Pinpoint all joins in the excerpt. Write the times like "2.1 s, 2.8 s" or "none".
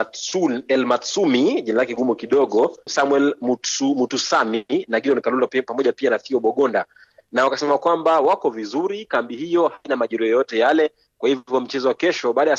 2.9 s